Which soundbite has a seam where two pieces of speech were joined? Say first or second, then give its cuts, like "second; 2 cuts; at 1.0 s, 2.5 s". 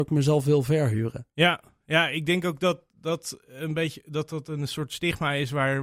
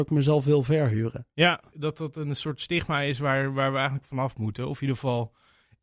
second; 1 cut; at 1.7 s